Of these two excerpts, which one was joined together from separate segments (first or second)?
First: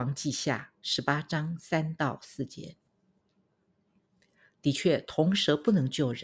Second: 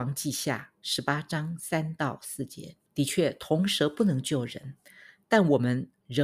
second